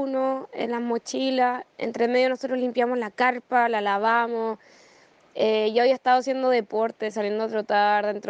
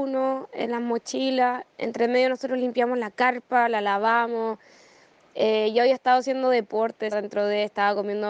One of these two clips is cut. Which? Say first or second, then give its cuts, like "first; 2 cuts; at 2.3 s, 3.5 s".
second; 1 cut; at 7.1 s